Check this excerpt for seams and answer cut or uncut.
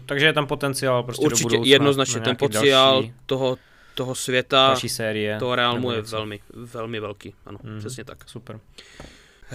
uncut